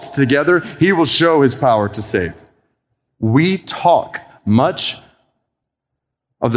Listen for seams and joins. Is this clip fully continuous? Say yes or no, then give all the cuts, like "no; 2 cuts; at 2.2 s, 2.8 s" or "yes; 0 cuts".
no; 1 cut; at 3.1 s